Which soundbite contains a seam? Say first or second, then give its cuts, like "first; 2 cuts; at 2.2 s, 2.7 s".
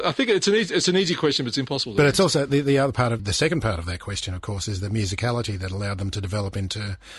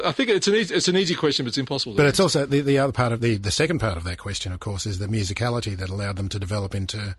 first; 1 cut; at 3.2 s